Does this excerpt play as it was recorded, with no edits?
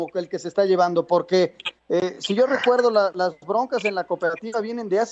yes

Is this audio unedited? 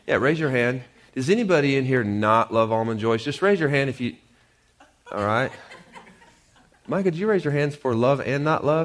yes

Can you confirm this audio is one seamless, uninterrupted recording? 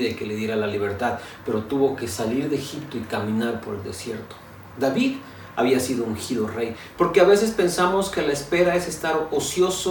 no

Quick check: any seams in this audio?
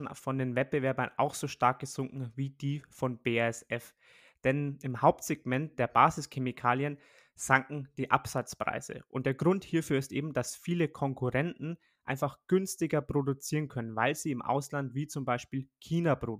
no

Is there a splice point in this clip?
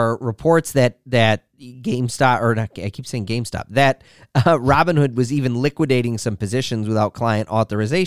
no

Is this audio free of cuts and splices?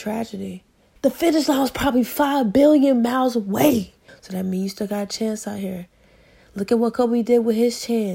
no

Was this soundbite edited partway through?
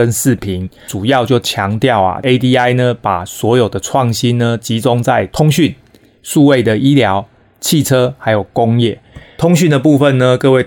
no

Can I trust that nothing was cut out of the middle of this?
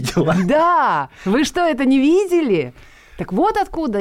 yes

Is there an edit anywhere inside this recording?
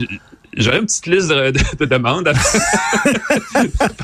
no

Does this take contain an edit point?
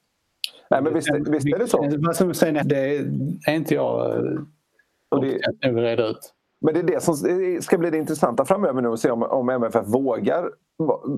yes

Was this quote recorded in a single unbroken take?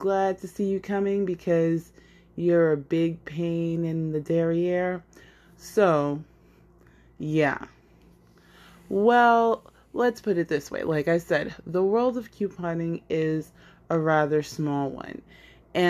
yes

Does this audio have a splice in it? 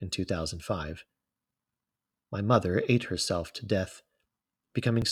no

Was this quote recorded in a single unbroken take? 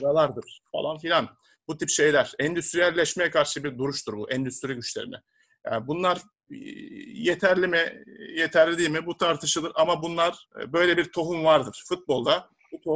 yes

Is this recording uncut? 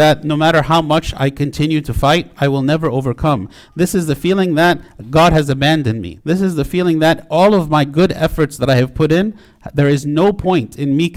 no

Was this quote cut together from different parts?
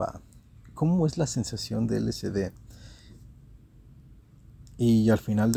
yes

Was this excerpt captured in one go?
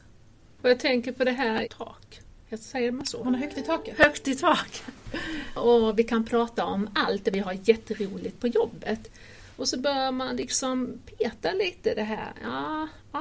no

